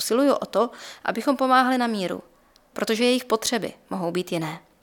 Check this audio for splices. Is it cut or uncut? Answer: cut